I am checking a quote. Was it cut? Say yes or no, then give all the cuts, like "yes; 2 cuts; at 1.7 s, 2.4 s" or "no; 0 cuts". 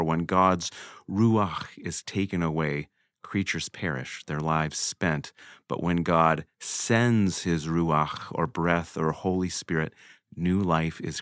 no; 0 cuts